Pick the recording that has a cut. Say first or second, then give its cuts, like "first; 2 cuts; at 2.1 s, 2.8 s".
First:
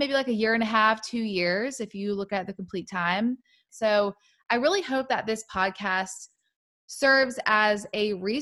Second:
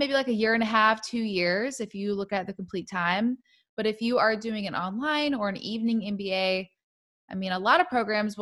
first; 1 cut; at 3.7 s